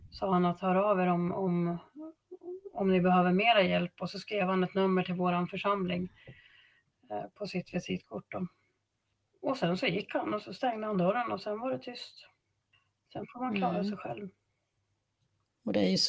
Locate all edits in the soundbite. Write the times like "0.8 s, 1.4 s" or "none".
none